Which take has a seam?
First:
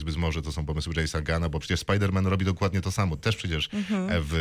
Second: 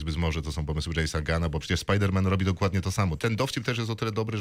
second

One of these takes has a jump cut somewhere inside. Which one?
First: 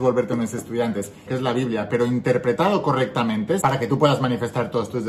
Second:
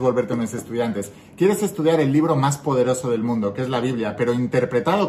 first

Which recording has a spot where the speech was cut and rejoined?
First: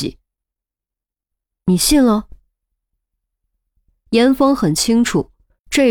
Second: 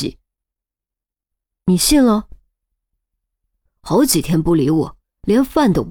second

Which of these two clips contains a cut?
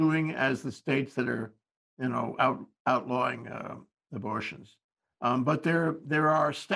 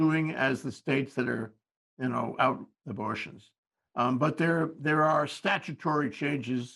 second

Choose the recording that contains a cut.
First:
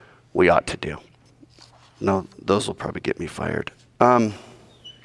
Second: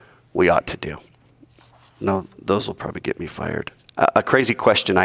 second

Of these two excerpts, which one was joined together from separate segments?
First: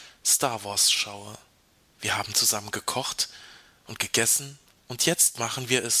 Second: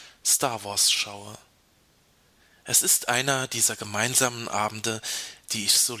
first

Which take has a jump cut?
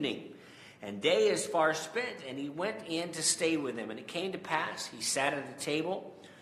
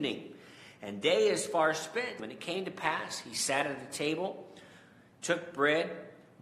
second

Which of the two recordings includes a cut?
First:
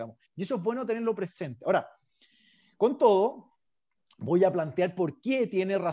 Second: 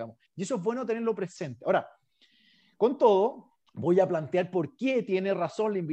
second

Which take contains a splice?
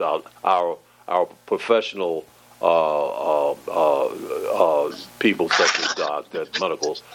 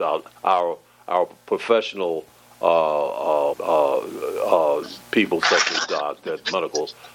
second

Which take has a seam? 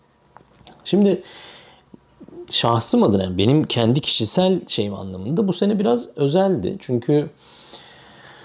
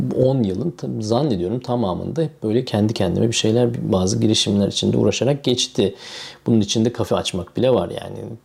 second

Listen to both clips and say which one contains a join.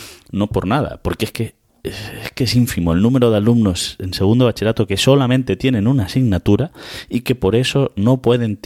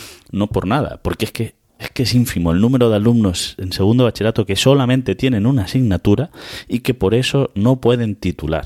second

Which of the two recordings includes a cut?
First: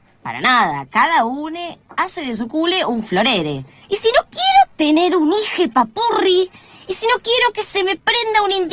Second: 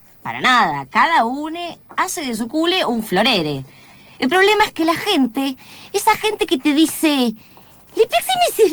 first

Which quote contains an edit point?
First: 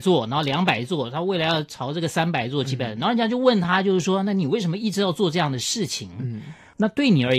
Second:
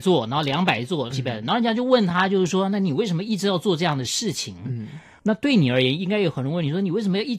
second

